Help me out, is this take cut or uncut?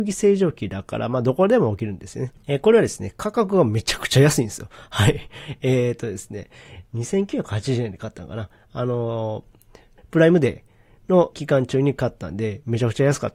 cut